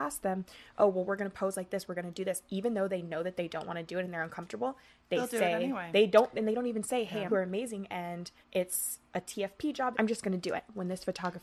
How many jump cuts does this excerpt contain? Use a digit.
3